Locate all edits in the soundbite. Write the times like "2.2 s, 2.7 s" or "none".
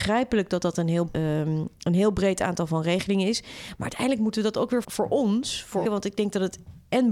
1.1 s, 4.8 s, 5.8 s